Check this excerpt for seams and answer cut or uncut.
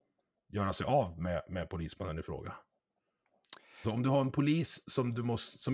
cut